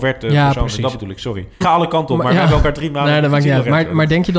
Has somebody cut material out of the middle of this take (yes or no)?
yes